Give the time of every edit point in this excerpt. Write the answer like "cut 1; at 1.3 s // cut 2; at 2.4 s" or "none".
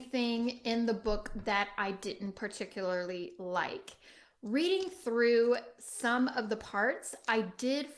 none